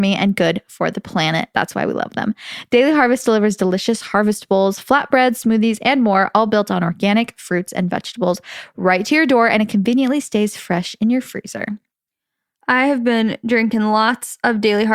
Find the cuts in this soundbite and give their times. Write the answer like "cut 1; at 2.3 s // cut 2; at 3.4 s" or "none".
none